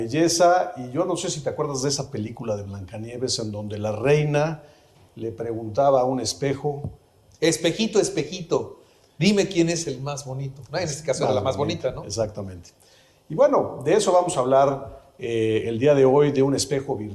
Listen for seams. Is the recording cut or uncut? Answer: uncut